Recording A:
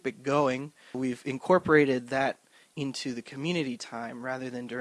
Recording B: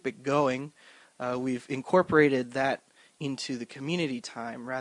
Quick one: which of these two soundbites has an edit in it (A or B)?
A